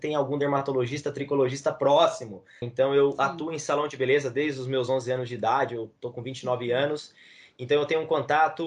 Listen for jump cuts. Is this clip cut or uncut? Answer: cut